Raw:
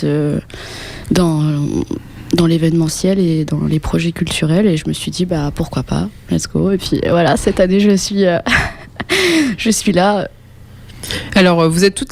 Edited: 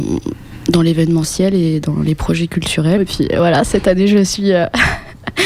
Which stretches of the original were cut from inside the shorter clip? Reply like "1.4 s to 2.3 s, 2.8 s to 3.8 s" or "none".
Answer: 4.6 s to 6.7 s